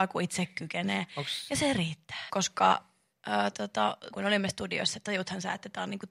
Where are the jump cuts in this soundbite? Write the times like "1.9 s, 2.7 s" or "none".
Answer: 2.3 s, 4.1 s